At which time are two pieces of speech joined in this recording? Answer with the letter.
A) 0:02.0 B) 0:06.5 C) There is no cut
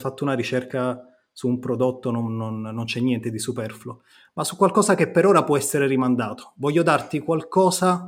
C